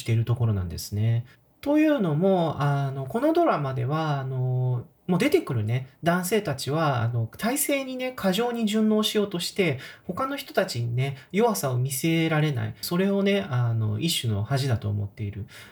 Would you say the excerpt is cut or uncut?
cut